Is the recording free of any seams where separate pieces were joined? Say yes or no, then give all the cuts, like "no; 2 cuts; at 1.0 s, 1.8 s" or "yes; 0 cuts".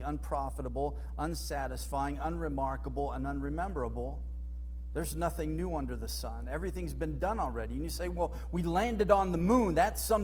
yes; 0 cuts